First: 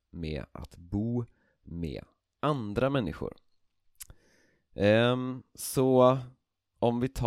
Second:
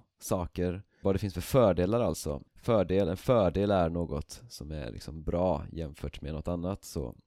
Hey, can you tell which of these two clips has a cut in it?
second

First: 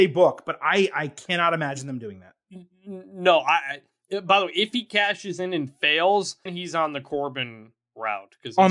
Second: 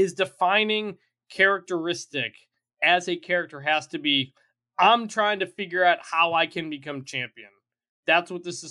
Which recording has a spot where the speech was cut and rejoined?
first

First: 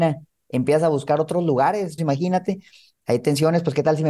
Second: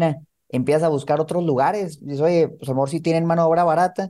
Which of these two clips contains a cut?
first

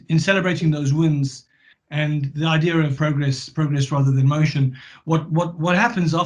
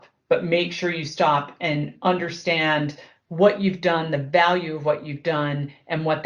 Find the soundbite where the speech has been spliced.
first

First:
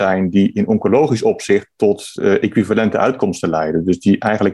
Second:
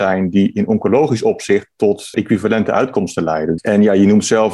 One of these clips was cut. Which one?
second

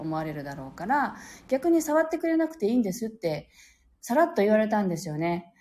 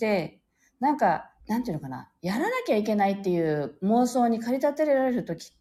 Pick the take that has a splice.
second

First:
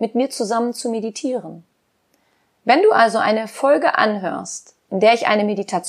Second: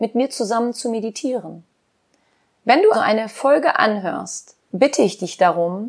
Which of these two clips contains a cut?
second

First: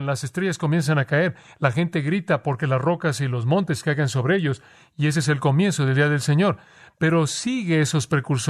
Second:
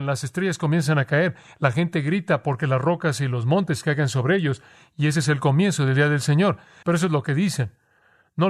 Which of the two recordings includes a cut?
second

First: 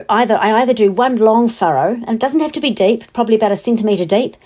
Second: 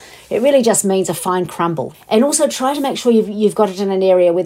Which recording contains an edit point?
second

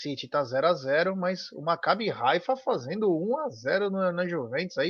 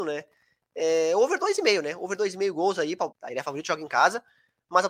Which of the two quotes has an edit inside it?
second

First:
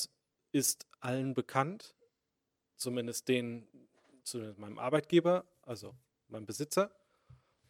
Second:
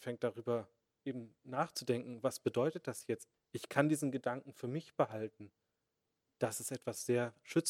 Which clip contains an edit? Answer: second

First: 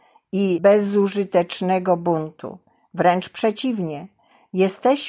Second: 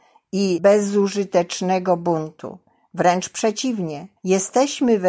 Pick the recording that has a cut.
second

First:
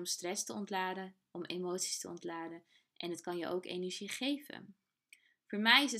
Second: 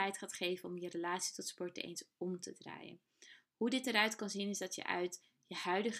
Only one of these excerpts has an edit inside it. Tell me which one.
second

